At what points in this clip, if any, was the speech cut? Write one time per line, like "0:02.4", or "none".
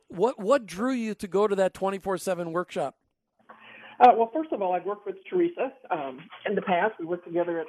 none